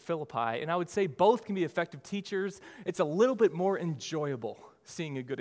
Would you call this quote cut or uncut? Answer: uncut